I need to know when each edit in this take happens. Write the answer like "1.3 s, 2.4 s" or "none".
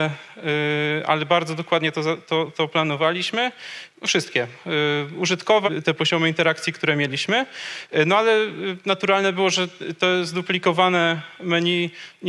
3.9 s, 5.7 s